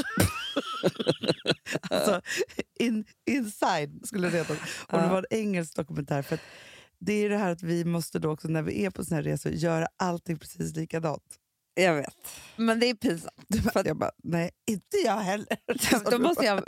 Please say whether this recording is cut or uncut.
cut